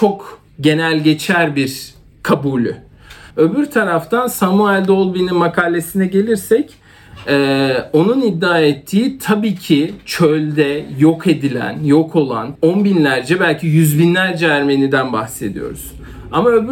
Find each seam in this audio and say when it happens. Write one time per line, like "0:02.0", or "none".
0:03.3
0:12.6